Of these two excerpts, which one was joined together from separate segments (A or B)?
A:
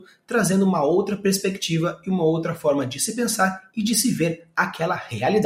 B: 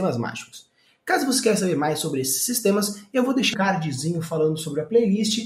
B